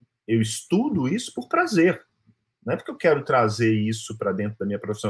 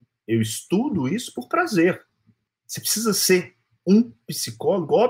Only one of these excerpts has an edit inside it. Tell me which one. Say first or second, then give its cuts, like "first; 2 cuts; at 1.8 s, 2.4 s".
second; 1 cut; at 2.5 s